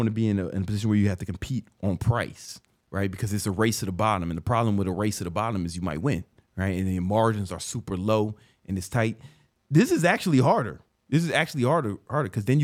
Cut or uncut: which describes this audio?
uncut